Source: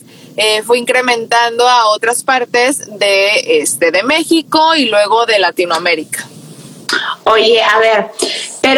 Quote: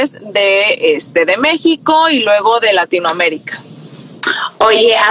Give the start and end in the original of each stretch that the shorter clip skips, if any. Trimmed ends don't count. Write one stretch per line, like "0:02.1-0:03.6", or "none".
none